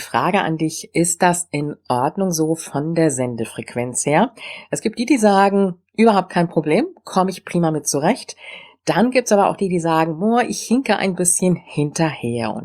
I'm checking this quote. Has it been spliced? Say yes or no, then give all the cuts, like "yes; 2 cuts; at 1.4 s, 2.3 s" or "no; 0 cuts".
no; 0 cuts